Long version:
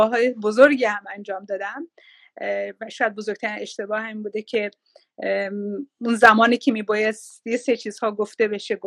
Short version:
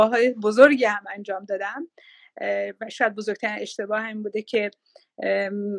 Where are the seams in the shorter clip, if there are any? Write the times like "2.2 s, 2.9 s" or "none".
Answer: none